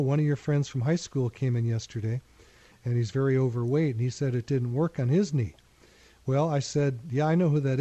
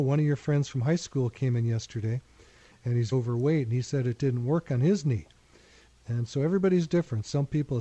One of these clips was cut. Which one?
second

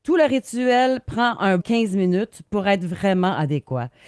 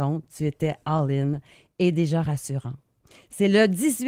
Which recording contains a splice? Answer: first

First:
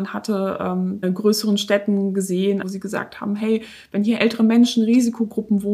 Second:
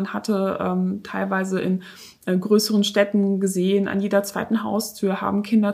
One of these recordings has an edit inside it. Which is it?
first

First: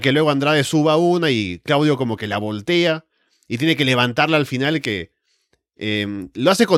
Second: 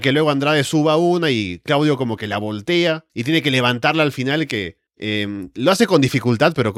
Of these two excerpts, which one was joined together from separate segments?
second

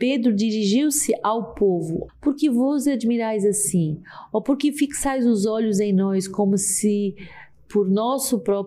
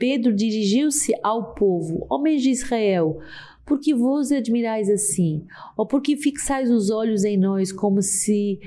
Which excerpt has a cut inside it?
first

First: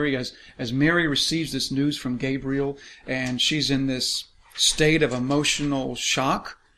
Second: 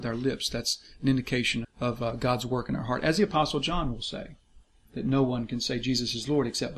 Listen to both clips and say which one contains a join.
second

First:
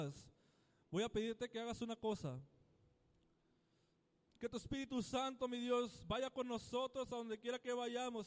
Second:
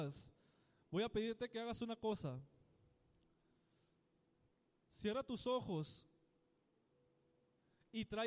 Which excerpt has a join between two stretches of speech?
first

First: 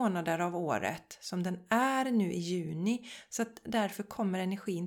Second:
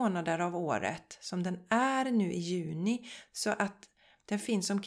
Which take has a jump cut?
second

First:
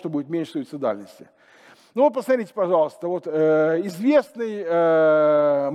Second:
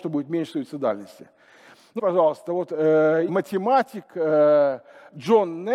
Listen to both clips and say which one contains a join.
second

